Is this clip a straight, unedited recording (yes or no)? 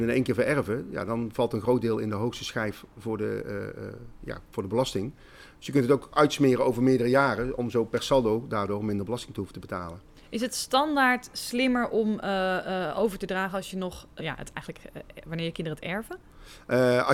no